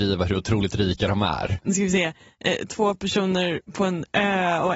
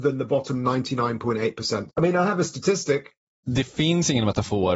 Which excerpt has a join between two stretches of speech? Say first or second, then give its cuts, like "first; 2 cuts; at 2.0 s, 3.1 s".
second; 1 cut; at 1.9 s